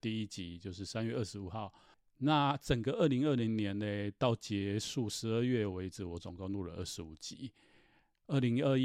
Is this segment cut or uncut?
uncut